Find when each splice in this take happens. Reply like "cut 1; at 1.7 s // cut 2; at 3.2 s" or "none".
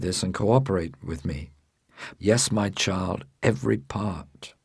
cut 1; at 2.2 s